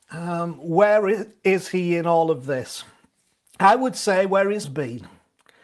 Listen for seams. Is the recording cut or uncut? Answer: cut